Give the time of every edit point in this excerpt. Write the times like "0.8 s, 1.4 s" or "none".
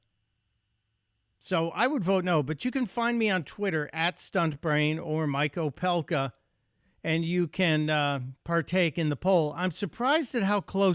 none

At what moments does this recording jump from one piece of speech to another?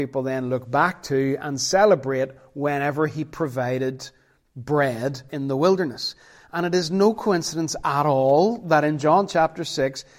5.3 s

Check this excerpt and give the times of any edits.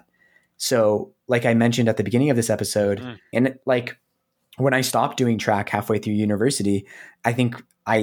3.3 s

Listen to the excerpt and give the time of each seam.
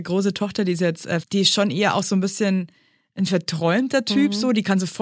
1.2 s

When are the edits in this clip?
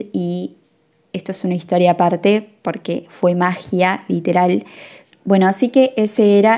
5.1 s

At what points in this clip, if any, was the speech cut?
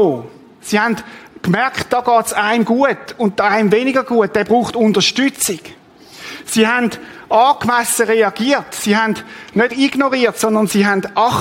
9.7 s

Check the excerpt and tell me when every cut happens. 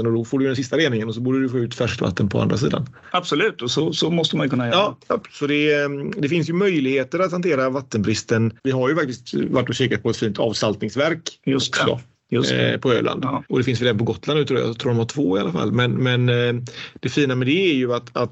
none

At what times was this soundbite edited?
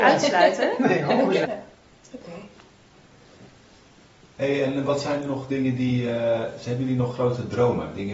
1.4 s

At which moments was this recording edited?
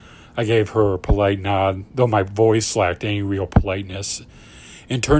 none

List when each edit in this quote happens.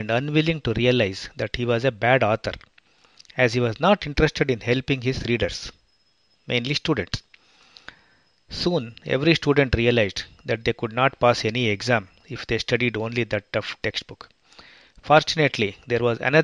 none

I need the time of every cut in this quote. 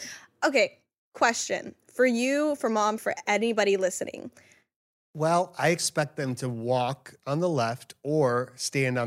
3.0 s, 5.1 s

